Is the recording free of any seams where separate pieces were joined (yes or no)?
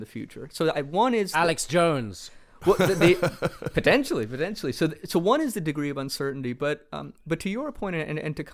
yes